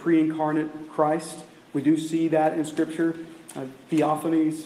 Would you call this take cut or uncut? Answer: uncut